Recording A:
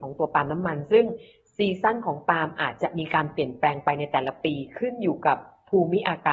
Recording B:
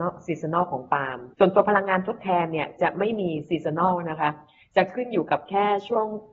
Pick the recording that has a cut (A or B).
B